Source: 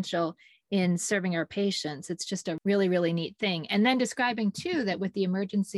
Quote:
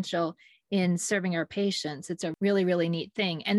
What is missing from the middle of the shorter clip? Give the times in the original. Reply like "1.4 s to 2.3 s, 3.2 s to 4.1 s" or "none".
2.2 s to 2.4 s